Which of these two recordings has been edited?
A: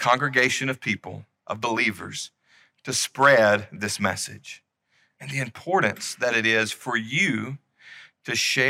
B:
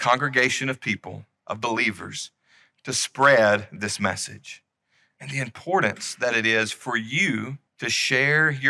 B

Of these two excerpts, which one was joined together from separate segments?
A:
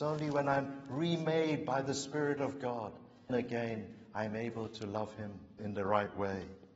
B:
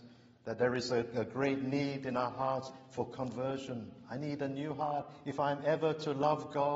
A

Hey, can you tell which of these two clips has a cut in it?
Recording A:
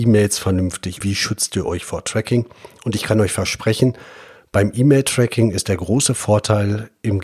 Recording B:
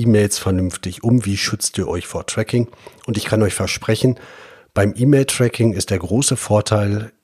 A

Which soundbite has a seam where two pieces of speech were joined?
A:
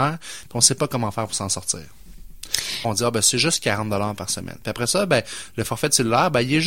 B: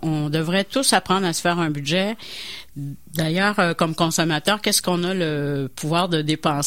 A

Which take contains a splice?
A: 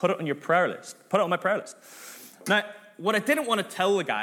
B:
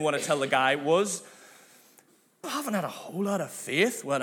B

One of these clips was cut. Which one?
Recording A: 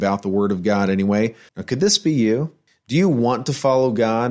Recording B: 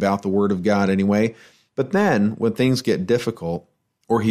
A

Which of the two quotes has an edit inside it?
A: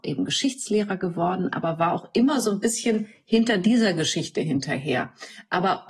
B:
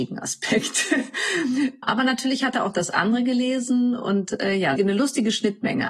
B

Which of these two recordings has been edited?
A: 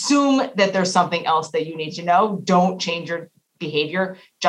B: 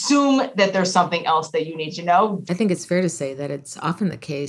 B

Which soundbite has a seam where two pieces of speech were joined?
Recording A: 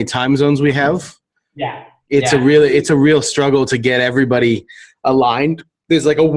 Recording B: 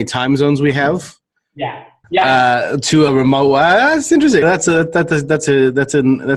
B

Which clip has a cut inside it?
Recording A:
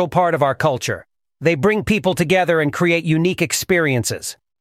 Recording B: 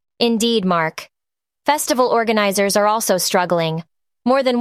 B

